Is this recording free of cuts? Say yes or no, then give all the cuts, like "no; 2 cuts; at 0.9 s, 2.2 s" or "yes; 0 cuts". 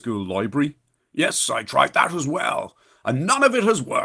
yes; 0 cuts